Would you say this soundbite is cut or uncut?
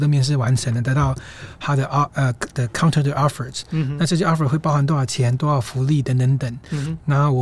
uncut